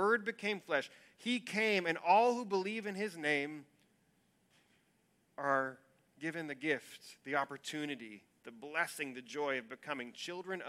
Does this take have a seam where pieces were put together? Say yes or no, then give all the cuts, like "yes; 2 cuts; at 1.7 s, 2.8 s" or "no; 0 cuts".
no; 0 cuts